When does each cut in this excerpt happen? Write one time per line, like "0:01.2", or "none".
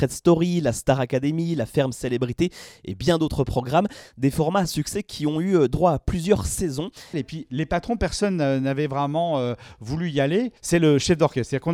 0:07.1
0:10.6